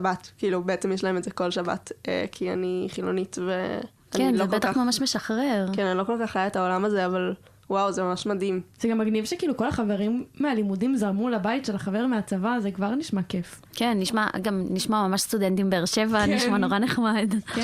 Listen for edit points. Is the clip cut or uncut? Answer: uncut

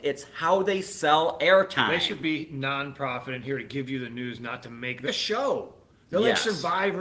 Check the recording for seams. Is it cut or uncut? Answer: cut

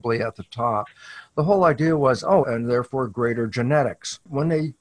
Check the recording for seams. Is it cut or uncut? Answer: cut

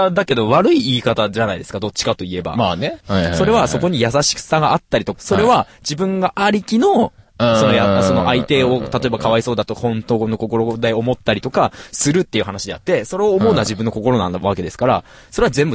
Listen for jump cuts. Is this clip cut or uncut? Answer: cut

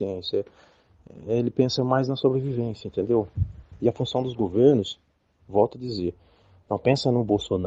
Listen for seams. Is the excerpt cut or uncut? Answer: uncut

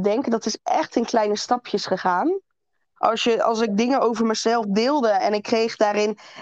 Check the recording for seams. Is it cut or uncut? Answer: cut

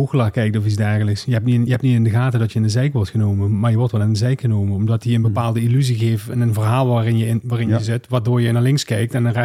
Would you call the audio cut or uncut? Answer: uncut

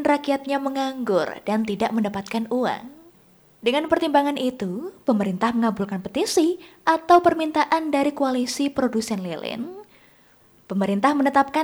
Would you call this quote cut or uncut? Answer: uncut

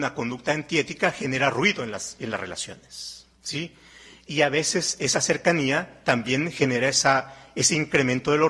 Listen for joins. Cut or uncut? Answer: cut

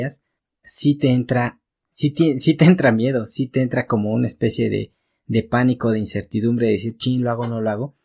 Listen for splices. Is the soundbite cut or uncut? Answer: uncut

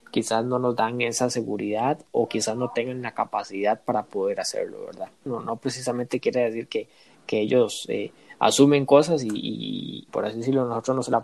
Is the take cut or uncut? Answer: cut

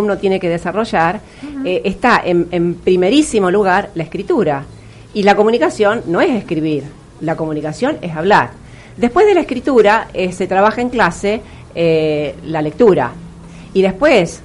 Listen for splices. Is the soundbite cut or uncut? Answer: uncut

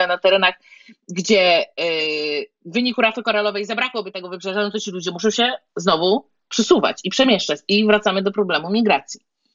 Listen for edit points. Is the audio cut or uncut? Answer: uncut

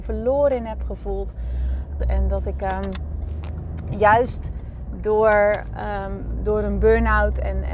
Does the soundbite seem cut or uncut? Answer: cut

